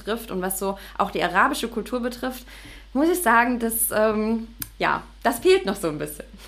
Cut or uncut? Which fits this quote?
uncut